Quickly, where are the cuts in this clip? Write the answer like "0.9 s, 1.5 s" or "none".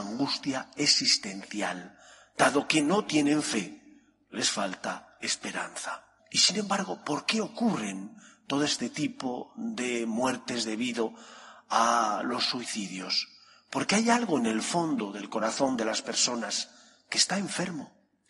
6.2 s